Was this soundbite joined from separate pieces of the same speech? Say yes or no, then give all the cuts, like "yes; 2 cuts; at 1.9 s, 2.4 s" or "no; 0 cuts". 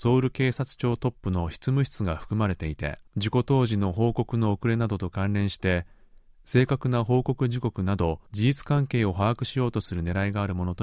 yes; 2 cuts; at 3.1 s, 8.3 s